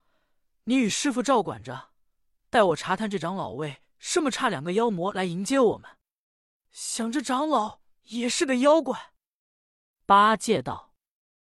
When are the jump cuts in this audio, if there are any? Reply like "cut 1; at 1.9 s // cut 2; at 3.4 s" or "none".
none